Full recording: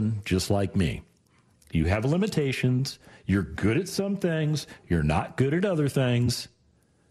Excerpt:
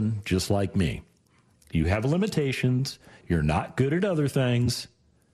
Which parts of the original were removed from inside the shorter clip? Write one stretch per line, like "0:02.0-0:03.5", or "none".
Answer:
0:03.2-0:04.8